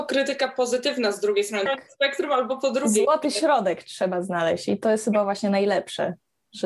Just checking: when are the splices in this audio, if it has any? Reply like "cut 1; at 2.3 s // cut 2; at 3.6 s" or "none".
cut 1; at 1.7 s